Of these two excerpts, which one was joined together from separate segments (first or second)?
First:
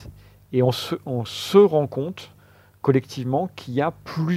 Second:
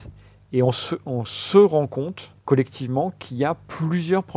second